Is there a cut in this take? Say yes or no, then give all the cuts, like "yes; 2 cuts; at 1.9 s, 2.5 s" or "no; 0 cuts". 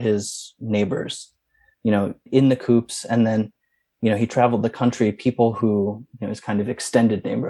yes; 1 cut; at 2.3 s